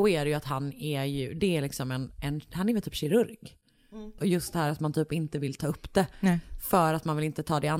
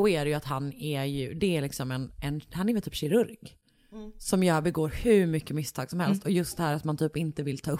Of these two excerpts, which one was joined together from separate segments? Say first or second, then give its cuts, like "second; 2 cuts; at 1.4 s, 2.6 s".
first; 1 cut; at 4.2 s